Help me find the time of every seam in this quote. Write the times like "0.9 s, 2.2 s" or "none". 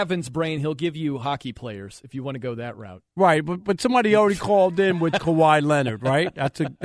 none